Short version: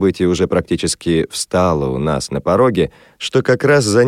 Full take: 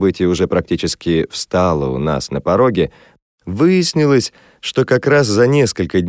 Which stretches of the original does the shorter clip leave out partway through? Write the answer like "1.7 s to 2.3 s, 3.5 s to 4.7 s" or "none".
3.1 s to 4.5 s